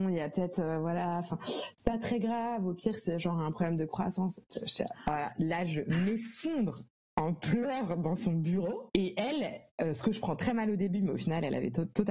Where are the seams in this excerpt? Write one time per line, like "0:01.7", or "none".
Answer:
0:08.9